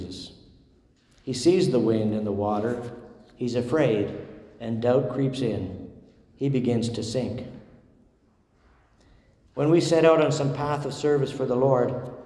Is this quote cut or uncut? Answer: uncut